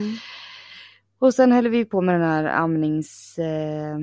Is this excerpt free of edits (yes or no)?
yes